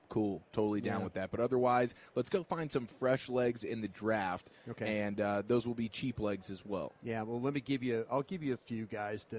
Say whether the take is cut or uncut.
uncut